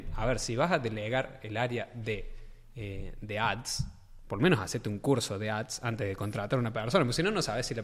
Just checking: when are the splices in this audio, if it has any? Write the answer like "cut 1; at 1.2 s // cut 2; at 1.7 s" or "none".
none